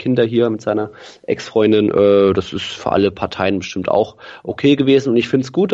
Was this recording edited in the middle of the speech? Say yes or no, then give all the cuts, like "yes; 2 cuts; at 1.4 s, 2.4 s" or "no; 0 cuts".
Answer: no; 0 cuts